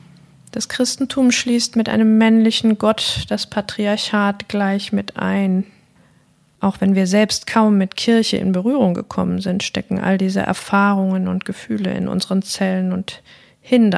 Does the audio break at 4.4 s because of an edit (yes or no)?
no